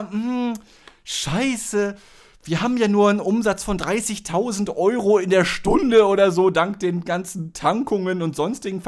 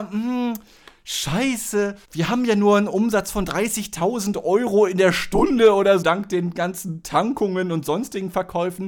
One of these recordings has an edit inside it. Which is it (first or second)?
second